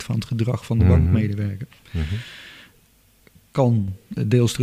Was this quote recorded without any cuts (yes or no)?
yes